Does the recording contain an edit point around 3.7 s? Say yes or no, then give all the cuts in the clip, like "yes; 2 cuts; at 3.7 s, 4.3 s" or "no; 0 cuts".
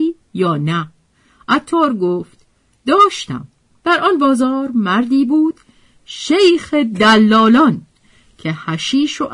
yes; 1 cut; at 3.7 s